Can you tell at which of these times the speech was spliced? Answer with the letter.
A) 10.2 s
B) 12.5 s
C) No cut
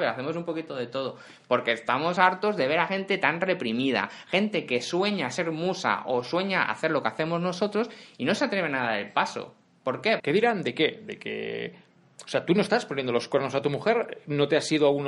A